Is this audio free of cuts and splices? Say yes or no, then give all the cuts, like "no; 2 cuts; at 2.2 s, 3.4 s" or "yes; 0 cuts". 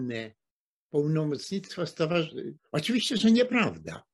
no; 1 cut; at 2.6 s